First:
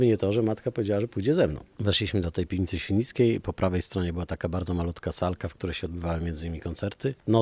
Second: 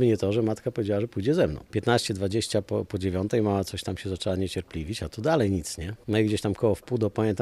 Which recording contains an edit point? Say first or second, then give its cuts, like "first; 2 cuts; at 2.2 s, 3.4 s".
second; 1 cut; at 1.7 s